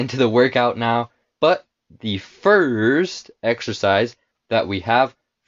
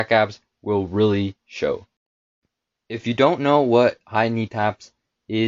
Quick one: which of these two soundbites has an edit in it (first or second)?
first